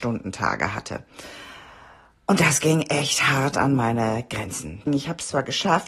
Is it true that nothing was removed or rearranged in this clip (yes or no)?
no